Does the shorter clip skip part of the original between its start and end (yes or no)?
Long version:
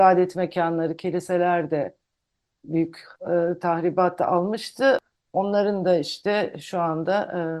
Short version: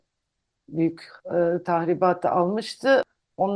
no